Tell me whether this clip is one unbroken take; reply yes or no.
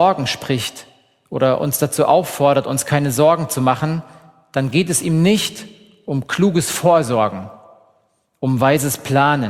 yes